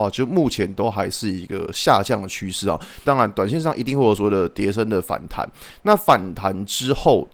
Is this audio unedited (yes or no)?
no